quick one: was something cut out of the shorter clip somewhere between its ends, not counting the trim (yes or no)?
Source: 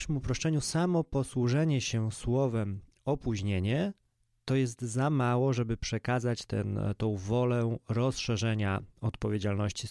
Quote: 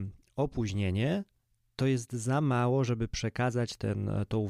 no